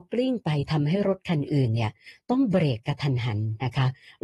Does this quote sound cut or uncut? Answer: uncut